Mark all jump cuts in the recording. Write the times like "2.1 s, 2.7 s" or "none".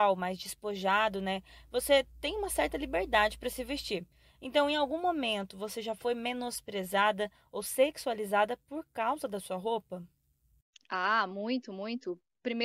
none